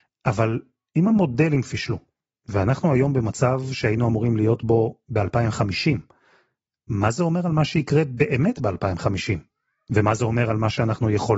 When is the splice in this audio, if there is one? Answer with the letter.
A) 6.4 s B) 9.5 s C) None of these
C